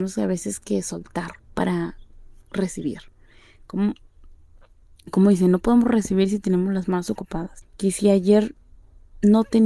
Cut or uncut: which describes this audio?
cut